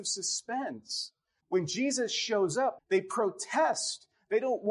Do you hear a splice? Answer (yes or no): yes